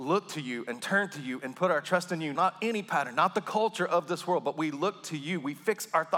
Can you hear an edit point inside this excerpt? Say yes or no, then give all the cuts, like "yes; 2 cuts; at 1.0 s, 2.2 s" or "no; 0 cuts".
yes; 1 cut; at 2.3 s